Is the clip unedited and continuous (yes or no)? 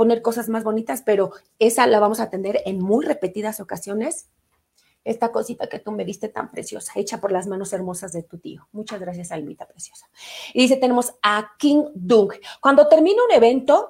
yes